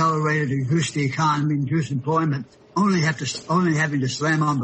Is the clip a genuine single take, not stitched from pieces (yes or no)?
yes